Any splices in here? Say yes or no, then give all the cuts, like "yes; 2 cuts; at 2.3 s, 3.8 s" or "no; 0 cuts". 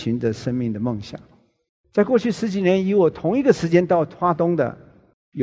no; 0 cuts